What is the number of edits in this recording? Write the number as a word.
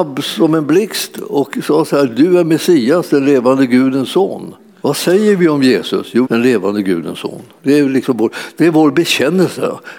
two